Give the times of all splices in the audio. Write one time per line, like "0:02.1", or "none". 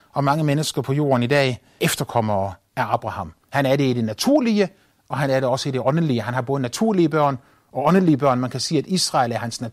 0:01.8